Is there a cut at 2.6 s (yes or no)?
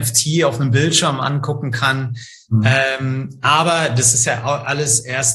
no